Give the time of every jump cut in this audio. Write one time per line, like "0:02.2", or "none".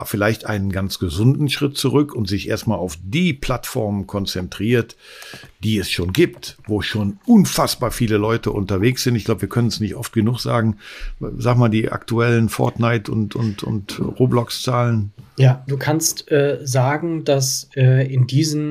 0:15.7